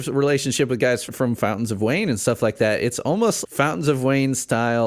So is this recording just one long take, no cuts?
no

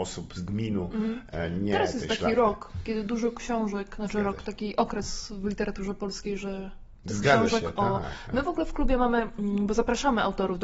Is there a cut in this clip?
no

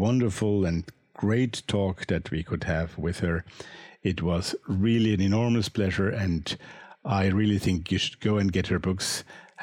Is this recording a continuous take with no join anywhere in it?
yes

